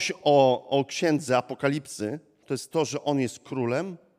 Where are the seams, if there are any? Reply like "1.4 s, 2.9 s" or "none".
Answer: 2.4 s

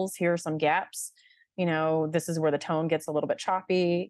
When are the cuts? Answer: none

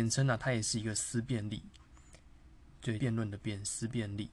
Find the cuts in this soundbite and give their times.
3.0 s

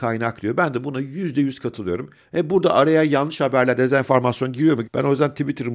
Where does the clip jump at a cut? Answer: 2.2 s, 4.8 s

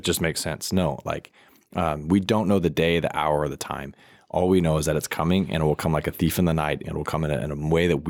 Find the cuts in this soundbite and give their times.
6.8 s

